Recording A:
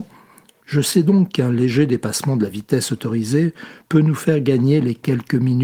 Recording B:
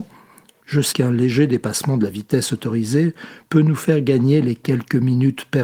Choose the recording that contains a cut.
B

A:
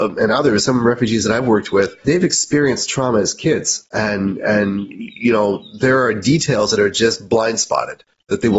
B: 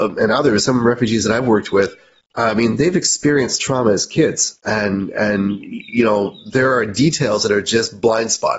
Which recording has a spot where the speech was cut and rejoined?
A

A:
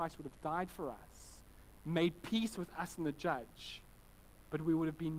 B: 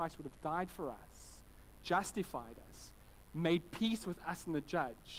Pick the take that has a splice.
A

